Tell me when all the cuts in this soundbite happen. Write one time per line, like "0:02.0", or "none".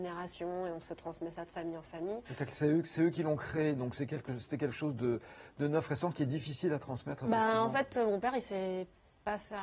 none